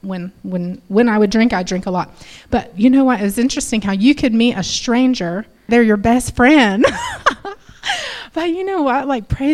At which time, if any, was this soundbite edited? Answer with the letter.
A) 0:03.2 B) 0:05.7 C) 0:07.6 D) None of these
B